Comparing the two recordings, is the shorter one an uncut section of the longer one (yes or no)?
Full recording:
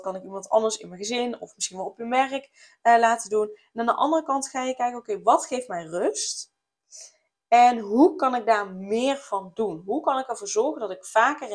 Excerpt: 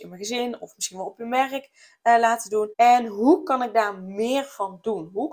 no